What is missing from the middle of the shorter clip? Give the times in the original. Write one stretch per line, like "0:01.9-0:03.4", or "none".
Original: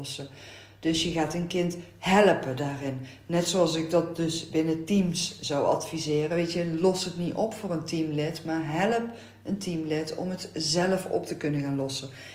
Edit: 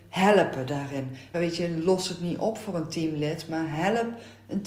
0:03.2-0:06.3